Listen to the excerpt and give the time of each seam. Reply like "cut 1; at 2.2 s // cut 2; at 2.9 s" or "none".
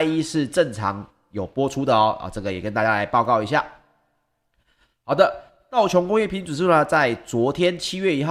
none